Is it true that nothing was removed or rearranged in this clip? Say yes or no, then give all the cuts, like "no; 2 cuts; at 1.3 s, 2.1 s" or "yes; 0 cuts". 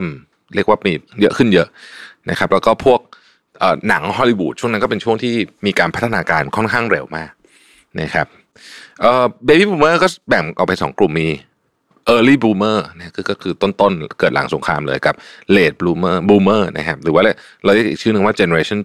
no; 1 cut; at 11.9 s